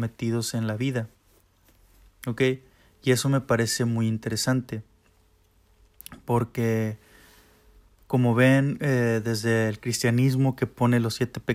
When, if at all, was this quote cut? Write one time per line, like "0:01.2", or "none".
none